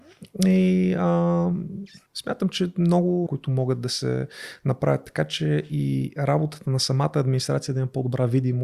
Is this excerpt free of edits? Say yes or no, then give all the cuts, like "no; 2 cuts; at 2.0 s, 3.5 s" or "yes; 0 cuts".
no; 2 cuts; at 2.1 s, 3.3 s